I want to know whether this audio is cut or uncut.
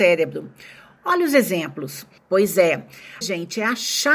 cut